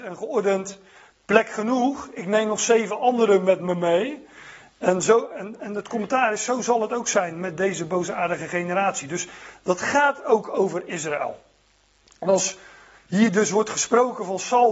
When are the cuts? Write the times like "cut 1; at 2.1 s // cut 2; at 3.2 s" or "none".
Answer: none